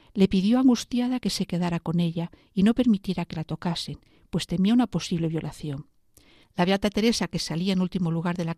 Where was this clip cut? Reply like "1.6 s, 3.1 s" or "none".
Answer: 6.4 s